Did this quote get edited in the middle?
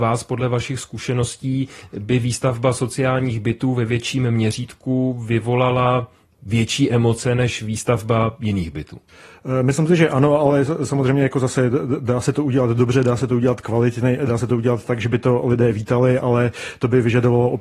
no; 0 cuts

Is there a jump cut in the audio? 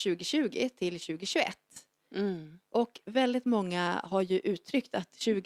no; 0 cuts

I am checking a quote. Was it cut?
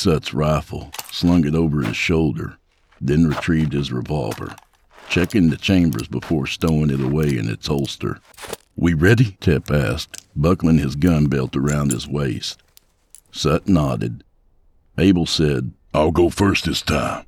no; 0 cuts

